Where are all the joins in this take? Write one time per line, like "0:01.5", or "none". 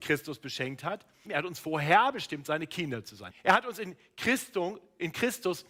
0:01.2
0:03.3